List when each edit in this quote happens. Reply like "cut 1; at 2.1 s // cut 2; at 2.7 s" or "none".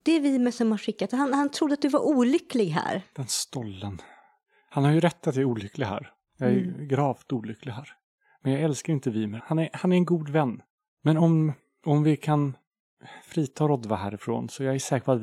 cut 1; at 9.4 s // cut 2; at 10.9 s